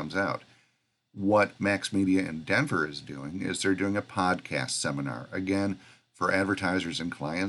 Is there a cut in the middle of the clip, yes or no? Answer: yes